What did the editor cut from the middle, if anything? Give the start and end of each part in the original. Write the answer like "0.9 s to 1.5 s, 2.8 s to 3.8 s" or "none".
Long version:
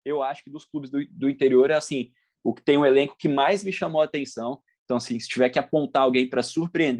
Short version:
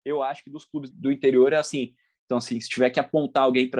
0.9 s to 1.1 s, 2.3 s to 4.7 s